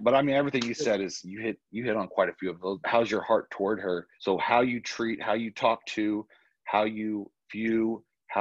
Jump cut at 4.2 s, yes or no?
yes